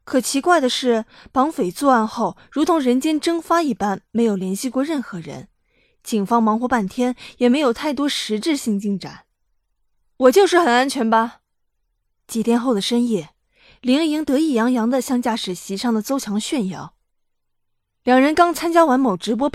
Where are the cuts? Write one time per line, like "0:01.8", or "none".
none